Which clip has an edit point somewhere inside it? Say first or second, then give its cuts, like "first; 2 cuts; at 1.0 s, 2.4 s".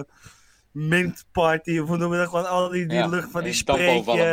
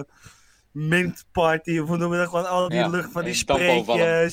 second; 1 cut; at 2.7 s